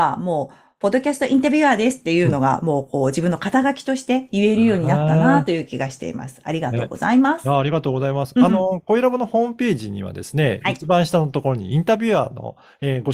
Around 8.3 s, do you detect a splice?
no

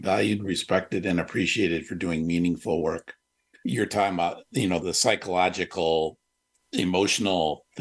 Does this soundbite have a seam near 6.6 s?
no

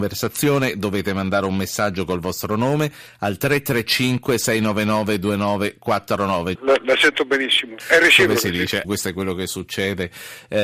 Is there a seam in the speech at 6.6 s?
yes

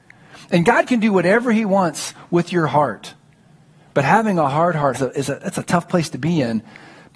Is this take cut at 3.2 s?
no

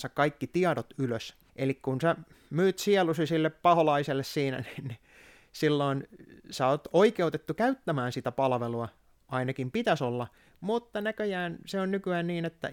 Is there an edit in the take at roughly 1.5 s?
yes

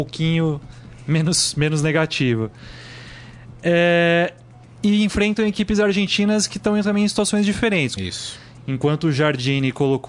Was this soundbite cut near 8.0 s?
yes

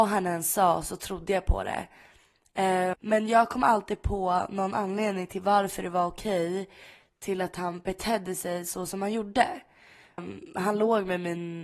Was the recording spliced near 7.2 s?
no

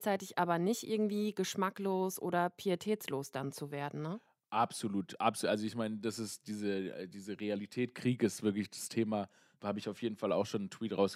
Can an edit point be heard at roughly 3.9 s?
no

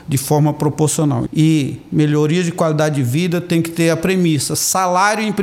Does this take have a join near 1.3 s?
yes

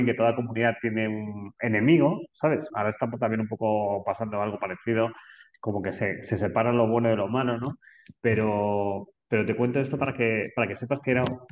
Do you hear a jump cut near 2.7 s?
yes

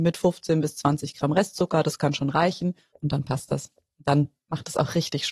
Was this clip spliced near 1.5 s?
no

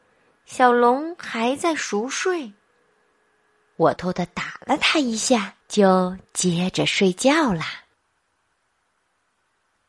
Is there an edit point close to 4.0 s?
yes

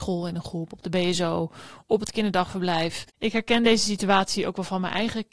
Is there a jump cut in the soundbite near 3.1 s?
yes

